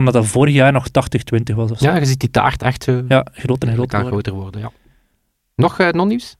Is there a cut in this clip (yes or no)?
no